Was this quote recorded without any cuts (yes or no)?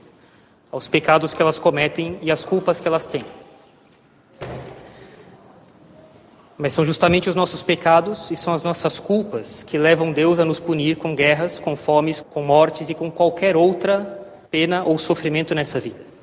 no